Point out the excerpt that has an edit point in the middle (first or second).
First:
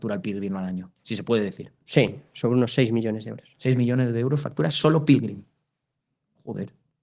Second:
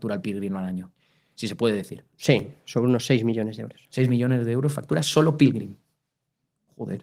first